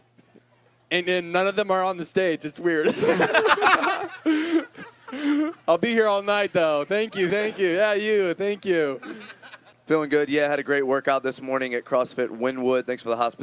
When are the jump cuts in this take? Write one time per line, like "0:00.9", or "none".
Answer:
0:07.3
0:09.7